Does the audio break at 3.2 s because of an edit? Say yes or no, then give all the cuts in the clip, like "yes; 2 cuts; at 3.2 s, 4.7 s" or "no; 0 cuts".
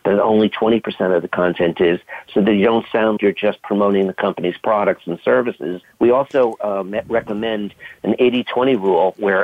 yes; 2 cuts; at 3.2 s, 5.8 s